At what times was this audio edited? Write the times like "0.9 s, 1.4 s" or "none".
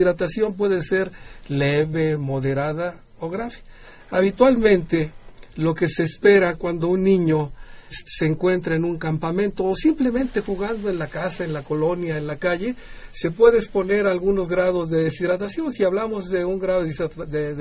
7.9 s